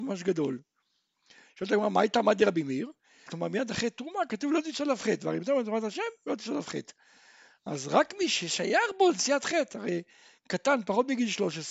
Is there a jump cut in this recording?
yes; 1 cut; at 3.3 s

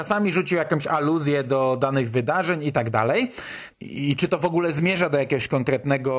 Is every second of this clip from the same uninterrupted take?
no; 1 cut; at 3.7 s

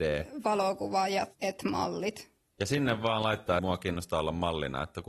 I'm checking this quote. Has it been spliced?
yes; 1 cut; at 3.6 s

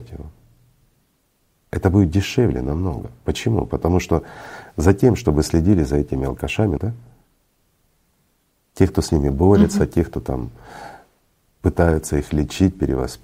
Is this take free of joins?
no; 1 cut; at 6.8 s

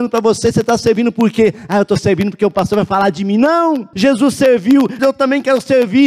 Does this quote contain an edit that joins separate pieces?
yes; 2 cuts; at 3.9 s, 5.0 s

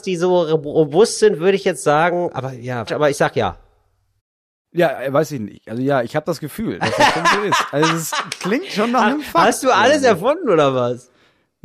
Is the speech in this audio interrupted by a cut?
yes; 1 cut; at 2.9 s

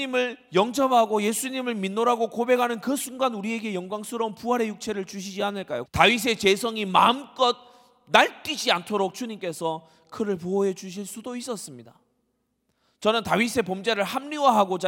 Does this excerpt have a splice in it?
yes; 1 cut; at 5.9 s

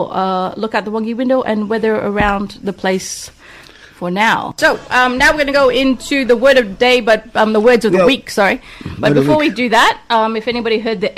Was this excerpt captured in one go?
yes; 0 cuts

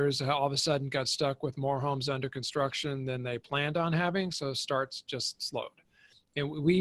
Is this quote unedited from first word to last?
yes; 0 cuts

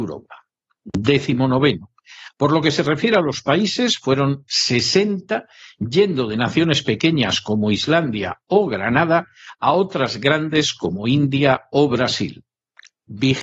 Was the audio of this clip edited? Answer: no; 0 cuts

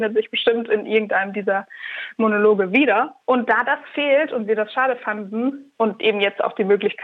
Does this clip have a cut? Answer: yes; 2 cuts; at 3.2 s, 5.8 s

